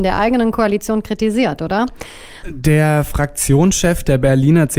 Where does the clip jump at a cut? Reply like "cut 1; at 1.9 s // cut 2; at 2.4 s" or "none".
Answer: cut 1; at 2.4 s